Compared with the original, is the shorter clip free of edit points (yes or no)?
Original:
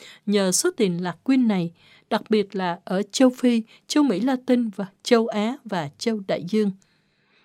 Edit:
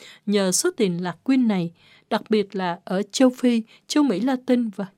yes